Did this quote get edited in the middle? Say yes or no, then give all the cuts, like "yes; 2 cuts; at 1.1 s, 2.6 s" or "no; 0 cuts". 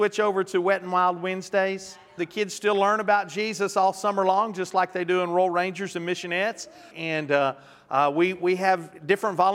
yes; 2 cuts; at 2.2 s, 6.9 s